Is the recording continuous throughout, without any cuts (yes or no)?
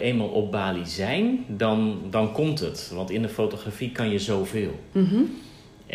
yes